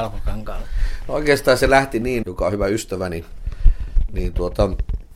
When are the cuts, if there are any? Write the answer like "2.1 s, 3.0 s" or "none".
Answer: 2.2 s